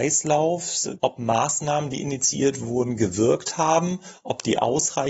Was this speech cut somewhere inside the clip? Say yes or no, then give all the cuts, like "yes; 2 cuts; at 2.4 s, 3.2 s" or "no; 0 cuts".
yes; 1 cut; at 1.0 s